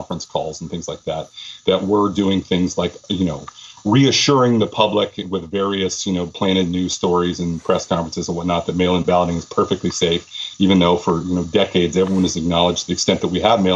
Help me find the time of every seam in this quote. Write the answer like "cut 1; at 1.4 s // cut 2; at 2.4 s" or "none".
none